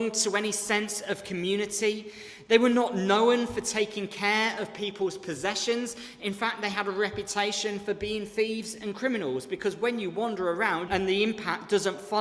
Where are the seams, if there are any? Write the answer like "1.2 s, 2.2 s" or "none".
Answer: 10.9 s